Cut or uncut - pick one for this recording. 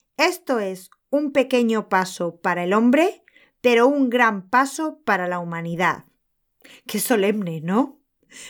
uncut